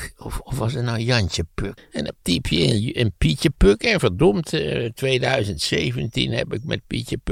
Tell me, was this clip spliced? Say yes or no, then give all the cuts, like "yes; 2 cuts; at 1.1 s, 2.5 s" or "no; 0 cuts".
yes; 1 cut; at 1.8 s